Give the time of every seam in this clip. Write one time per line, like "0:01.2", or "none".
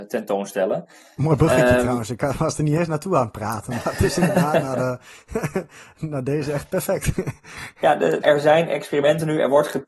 0:08.2